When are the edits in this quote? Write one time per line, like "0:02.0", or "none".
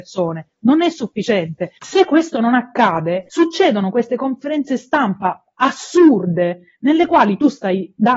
0:01.8